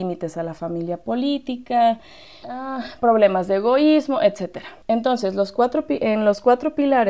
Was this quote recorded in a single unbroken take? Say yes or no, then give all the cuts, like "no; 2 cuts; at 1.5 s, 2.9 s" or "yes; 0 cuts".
no; 2 cuts; at 2.4 s, 4.8 s